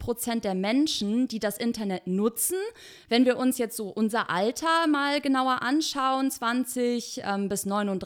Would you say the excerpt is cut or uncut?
uncut